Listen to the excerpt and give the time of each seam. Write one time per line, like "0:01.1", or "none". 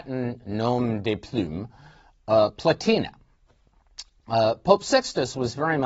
none